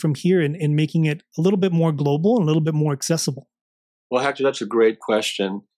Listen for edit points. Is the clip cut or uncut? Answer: uncut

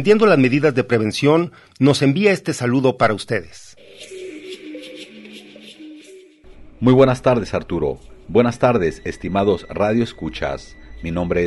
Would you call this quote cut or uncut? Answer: uncut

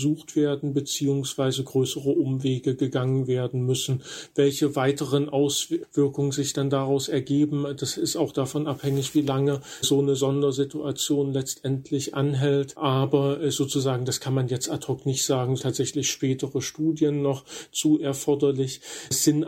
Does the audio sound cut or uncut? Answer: cut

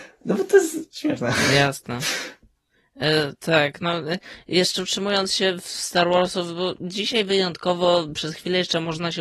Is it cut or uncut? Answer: uncut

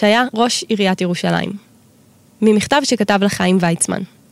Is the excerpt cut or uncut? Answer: uncut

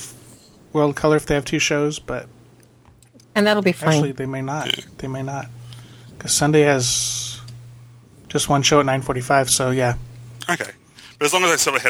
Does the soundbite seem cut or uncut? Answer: uncut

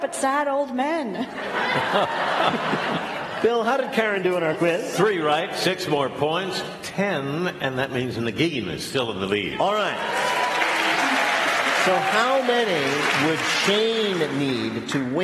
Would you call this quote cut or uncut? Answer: uncut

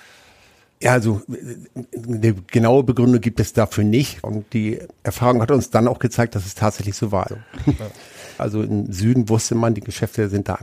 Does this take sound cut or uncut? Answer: cut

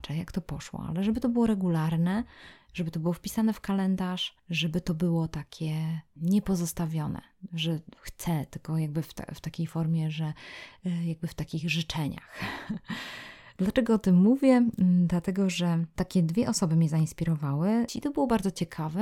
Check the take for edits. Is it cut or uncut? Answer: cut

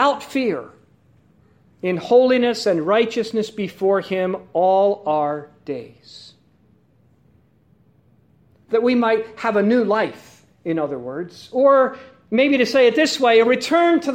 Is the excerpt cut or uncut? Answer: uncut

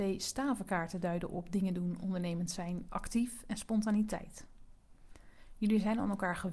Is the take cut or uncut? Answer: cut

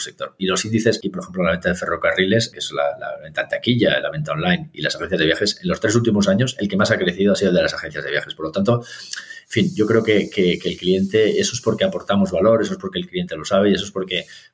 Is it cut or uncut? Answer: cut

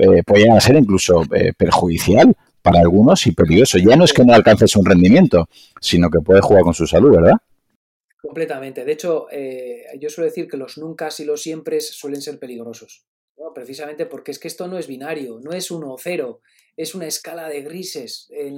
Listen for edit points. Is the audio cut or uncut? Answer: uncut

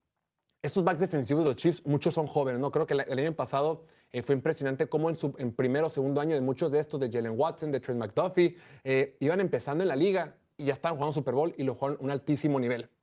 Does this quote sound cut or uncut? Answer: uncut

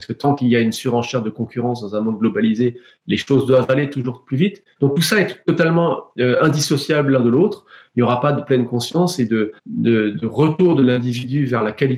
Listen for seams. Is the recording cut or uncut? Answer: cut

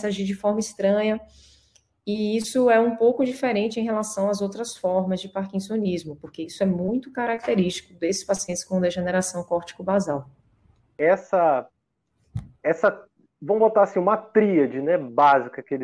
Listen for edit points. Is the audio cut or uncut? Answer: uncut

